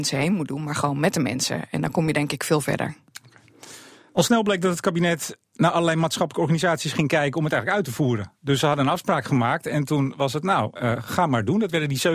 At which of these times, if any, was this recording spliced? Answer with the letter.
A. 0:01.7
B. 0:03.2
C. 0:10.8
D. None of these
C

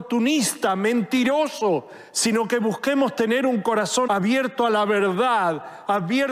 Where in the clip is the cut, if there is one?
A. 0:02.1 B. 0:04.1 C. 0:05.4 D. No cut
B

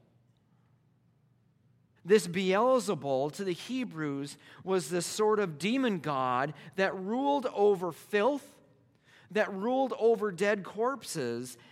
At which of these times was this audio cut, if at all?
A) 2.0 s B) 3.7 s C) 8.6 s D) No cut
A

